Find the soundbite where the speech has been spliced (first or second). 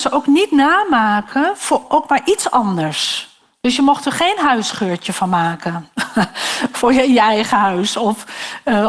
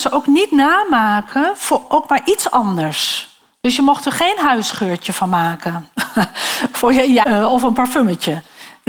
second